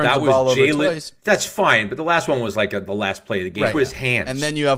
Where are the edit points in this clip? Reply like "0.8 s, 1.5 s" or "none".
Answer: 1.2 s, 3.7 s